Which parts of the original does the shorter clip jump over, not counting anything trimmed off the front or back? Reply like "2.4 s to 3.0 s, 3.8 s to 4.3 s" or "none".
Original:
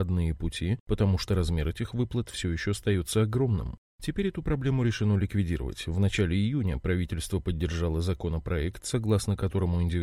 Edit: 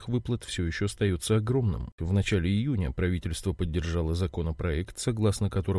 3.8 s to 5.8 s